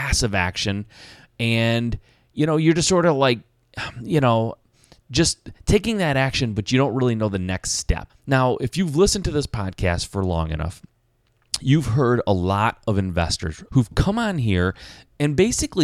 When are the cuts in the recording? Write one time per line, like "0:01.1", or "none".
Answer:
0:08.1
0:13.7